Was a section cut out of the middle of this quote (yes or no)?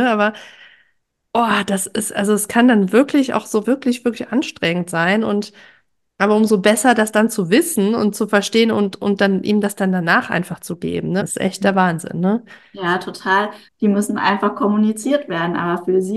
yes